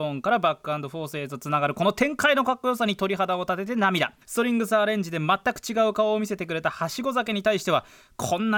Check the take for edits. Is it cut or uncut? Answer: cut